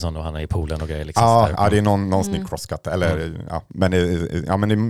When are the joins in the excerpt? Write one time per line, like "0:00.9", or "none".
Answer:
none